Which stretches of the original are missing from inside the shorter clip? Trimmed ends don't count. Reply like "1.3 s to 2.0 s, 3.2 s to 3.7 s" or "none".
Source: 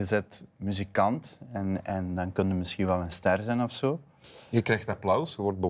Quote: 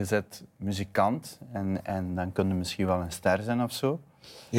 none